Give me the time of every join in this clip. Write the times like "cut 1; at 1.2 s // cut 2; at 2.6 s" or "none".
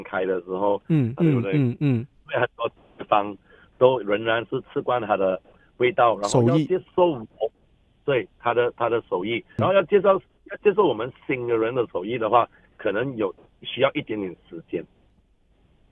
cut 1; at 1.2 s

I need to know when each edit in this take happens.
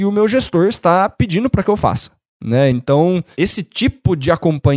none

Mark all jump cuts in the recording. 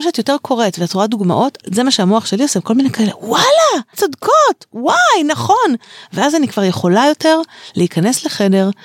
cut 1; at 3.9 s

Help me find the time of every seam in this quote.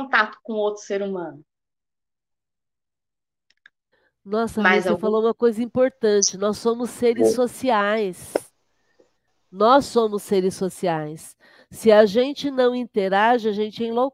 none

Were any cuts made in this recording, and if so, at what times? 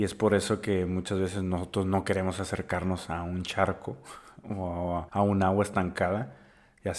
cut 1; at 5.1 s

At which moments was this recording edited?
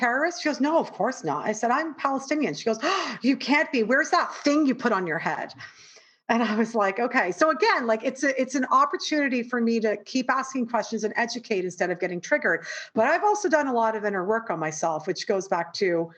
none

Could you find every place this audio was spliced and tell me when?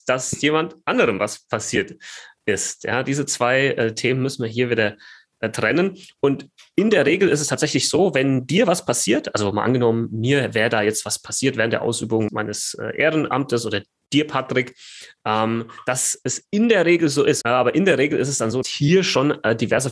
cut 1; at 12.3 s // cut 2; at 17.4 s // cut 3; at 18.6 s

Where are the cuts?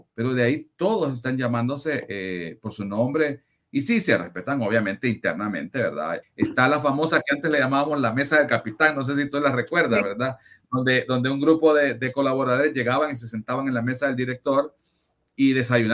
cut 1; at 6.2 s

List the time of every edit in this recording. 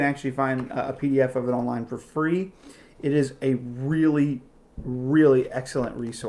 none

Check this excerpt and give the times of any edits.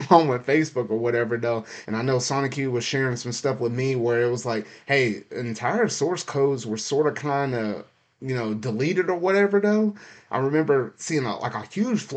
cut 1; at 1.8 s // cut 2; at 10.3 s

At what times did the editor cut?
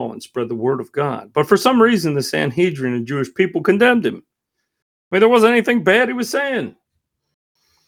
none

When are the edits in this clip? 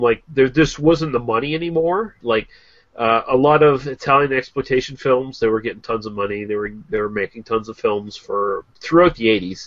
cut 1; at 2.2 s

